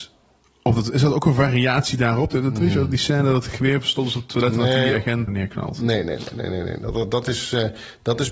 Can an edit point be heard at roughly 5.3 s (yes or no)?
yes